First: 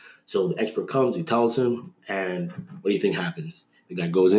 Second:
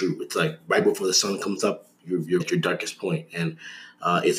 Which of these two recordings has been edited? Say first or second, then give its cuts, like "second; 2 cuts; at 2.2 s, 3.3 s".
second; 1 cut; at 2.4 s